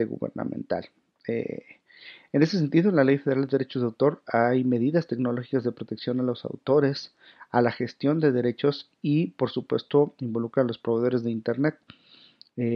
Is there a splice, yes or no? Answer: no